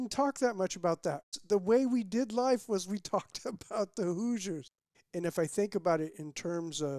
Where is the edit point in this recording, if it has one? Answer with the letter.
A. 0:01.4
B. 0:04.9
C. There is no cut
B